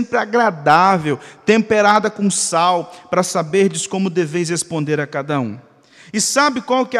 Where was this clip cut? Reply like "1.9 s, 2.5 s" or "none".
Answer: none